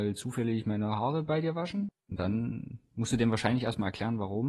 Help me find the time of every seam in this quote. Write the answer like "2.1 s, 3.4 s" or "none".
1.9 s